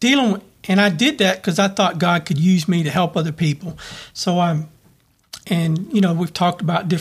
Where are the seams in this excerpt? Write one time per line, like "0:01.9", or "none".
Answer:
0:05.4